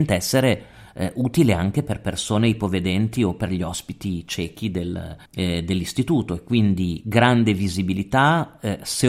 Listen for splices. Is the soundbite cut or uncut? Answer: cut